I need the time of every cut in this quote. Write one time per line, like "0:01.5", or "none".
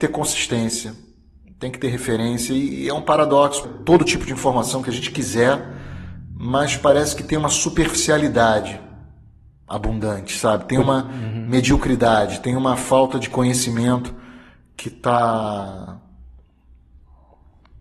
0:03.6